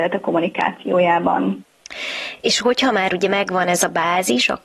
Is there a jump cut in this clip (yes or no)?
no